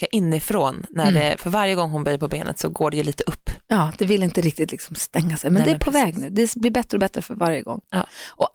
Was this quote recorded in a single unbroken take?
yes; 0 cuts

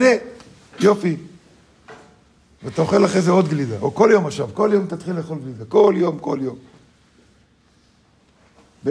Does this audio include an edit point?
no; 0 cuts

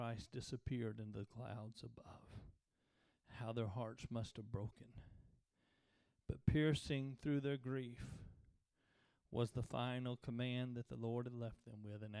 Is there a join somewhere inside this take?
no; 0 cuts

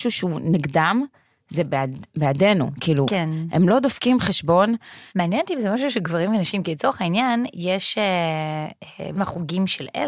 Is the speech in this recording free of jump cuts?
no; 2 cuts; at 5.1 s, 9.1 s

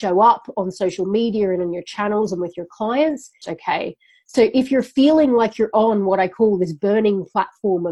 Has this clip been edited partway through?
yes; 1 cut; at 3.4 s

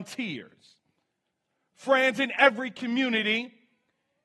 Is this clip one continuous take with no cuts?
yes; 0 cuts

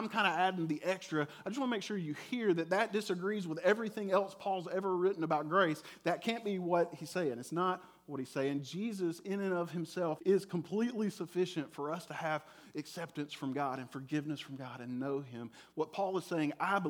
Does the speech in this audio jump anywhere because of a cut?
yes; 1 cut; at 10.2 s

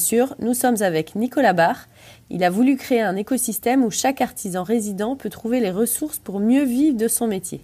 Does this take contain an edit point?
yes; 1 cut; at 2.2 s

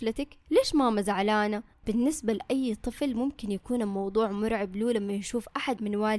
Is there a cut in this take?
yes; 1 cut; at 1.7 s

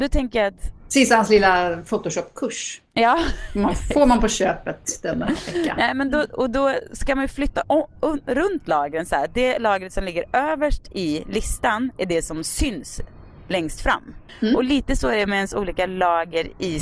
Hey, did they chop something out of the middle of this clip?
yes; 1 cut; at 7.6 s

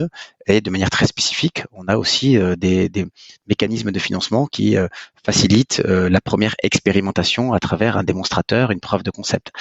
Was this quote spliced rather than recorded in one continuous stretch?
no; 0 cuts

